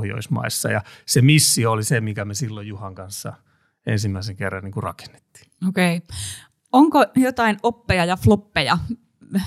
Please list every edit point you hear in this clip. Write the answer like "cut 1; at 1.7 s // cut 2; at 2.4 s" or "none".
none